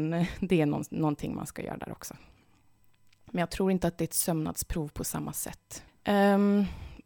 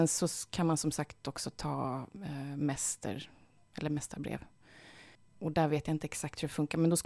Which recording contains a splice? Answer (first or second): first